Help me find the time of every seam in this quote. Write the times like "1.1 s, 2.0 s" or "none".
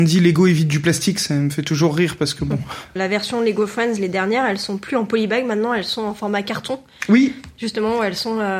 3.0 s